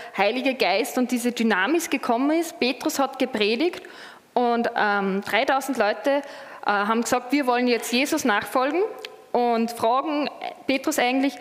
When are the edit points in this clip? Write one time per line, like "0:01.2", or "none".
none